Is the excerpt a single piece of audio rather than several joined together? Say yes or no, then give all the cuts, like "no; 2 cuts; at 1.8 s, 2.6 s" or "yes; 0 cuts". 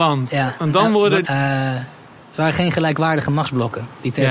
no; 1 cut; at 1.2 s